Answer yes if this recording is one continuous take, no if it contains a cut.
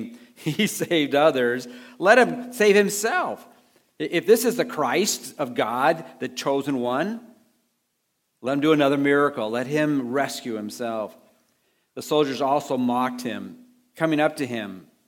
yes